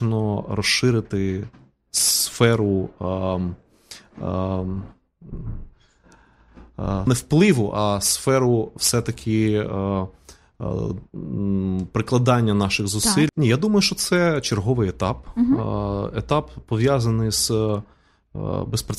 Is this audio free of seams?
no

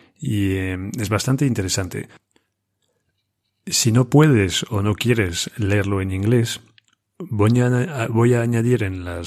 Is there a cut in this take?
no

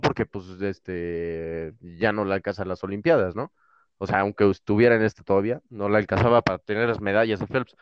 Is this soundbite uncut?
yes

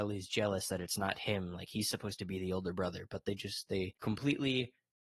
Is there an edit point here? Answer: yes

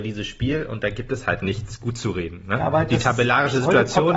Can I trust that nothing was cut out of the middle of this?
yes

